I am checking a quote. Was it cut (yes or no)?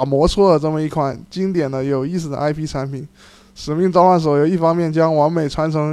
no